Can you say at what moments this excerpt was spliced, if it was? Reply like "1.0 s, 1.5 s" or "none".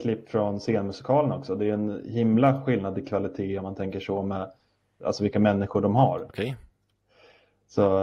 5.0 s, 6.3 s

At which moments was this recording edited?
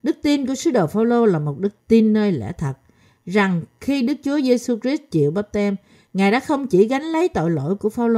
1.8 s

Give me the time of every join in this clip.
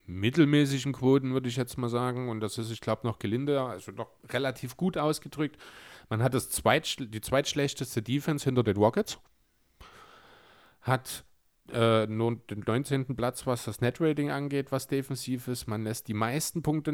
none

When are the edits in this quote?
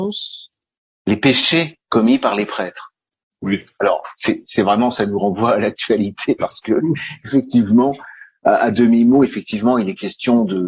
1.8 s, 4.4 s

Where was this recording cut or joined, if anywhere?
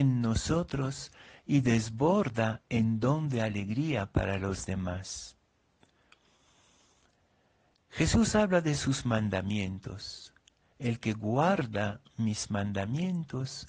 none

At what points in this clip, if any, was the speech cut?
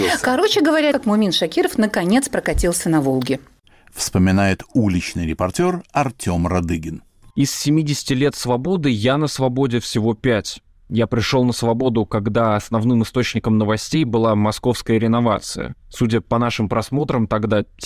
0.9 s, 15.8 s

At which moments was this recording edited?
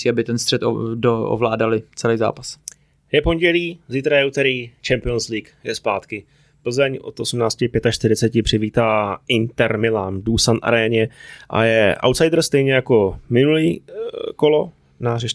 none

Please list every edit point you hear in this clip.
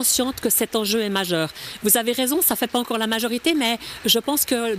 none

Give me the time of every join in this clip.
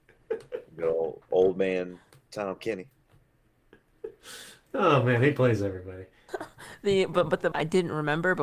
6.3 s, 7.5 s

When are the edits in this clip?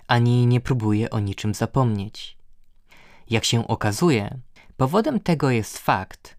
none

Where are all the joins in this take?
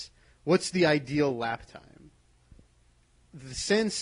none

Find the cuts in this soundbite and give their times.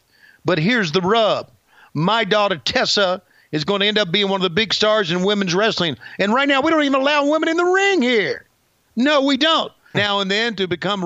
9.9 s

